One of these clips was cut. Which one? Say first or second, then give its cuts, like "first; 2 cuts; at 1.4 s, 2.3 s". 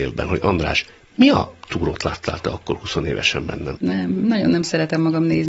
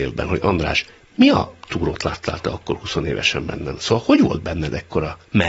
first; 1 cut; at 3.8 s